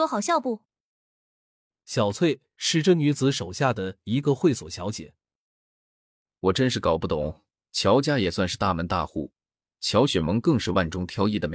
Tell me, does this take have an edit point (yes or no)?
no